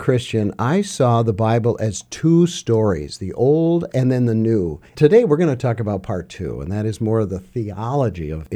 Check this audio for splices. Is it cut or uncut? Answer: cut